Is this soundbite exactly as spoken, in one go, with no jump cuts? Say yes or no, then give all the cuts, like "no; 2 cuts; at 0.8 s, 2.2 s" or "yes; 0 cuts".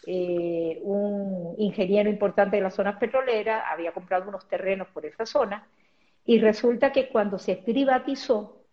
yes; 0 cuts